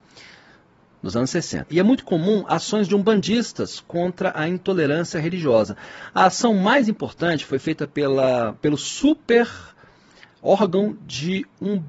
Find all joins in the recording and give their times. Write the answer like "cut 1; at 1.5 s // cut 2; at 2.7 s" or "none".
cut 1; at 1.7 s